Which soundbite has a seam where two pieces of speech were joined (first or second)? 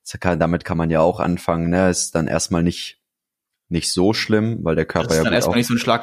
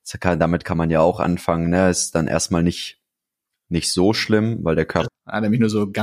second